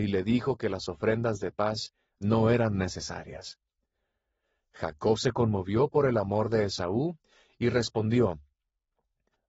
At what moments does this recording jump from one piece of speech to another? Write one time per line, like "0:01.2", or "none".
none

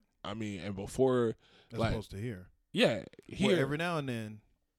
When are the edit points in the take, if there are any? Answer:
none

